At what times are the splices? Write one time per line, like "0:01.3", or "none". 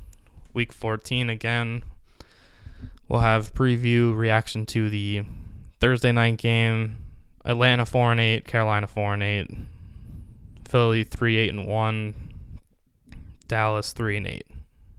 0:07.3